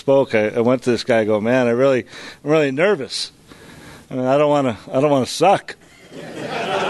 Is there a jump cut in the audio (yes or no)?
yes